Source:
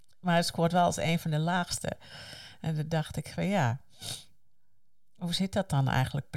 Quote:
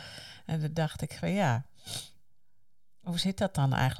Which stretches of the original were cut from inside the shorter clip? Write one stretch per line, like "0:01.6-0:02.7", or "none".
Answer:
none